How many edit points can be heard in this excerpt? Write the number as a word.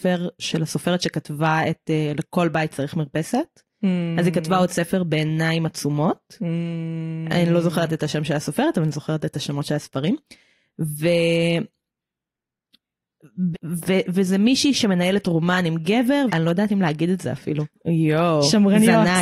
three